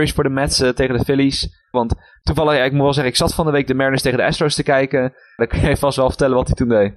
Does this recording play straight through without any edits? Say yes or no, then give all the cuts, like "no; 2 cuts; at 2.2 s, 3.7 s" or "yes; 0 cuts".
no; 2 cuts; at 1.7 s, 5.4 s